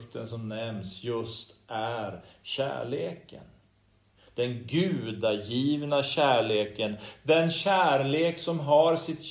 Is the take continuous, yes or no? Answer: yes